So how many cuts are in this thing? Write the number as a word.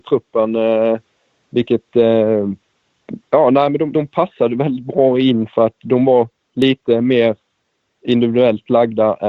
one